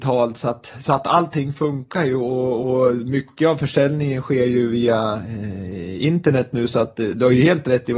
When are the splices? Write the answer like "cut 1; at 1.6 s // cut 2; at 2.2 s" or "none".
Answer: none

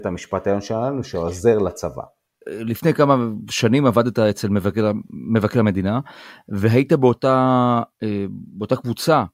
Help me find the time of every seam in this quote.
cut 1; at 2.4 s

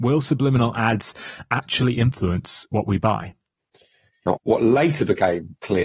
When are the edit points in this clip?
cut 1; at 4.3 s

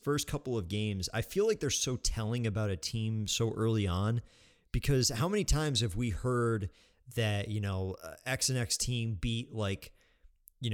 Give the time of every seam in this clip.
none

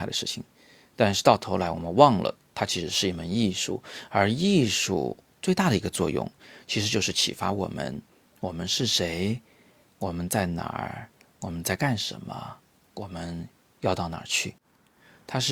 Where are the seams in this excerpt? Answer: none

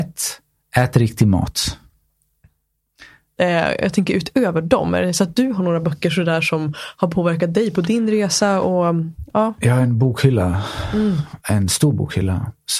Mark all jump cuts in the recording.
cut 1; at 3.4 s // cut 2; at 11.4 s

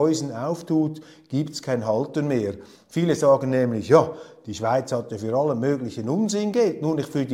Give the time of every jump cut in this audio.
cut 1; at 2.8 s

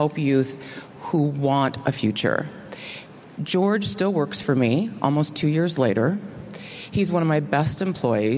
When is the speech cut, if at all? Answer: none

